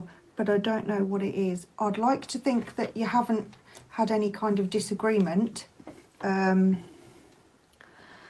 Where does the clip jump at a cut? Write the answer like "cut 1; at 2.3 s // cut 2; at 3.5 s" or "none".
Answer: none